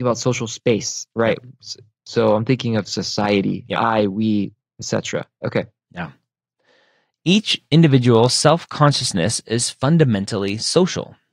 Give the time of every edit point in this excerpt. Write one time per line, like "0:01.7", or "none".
none

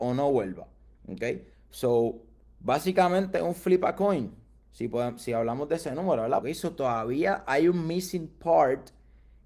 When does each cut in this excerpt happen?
0:01.5
0:06.4

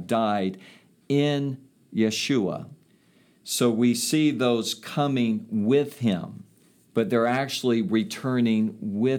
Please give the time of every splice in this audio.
0:06.9

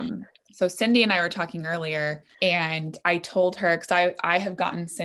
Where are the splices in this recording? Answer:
0:02.3

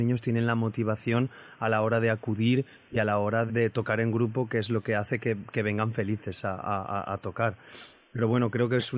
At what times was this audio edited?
0:03.5

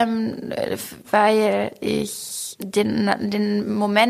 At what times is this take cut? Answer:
0:01.0
0:02.6

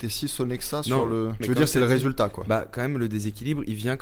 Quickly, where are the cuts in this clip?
0:01.4

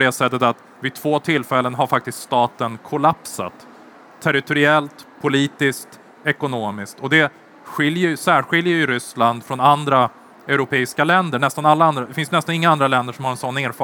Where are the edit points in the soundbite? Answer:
none

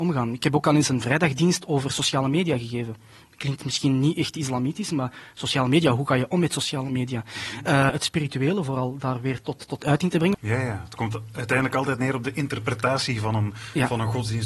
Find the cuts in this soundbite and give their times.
0:07.9
0:10.3

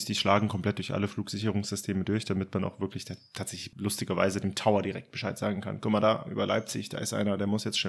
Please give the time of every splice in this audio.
none

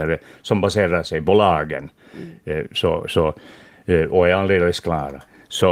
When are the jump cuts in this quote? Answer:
none

